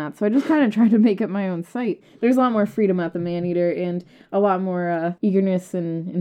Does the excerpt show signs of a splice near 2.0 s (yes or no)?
yes